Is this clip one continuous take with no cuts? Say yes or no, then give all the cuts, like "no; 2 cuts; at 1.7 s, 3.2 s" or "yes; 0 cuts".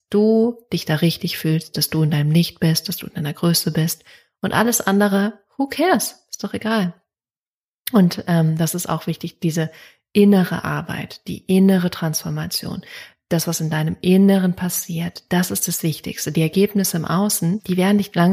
yes; 0 cuts